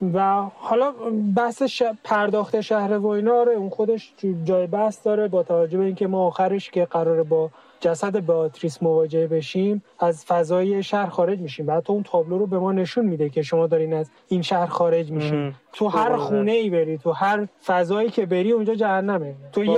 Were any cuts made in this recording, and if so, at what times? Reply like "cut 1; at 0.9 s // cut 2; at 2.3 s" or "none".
cut 1; at 15.7 s